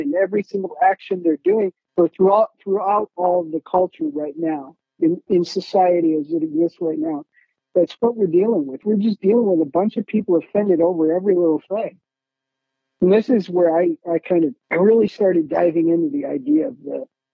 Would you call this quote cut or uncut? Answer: cut